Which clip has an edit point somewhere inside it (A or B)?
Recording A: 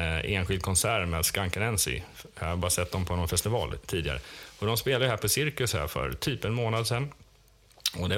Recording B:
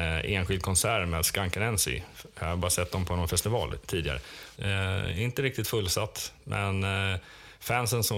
B